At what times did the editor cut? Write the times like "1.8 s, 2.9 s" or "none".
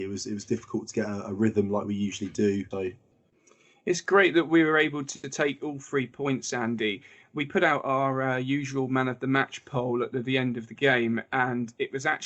2.7 s